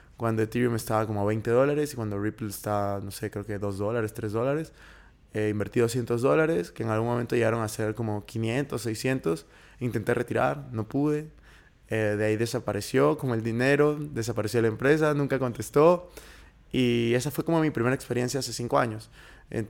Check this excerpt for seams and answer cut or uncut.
uncut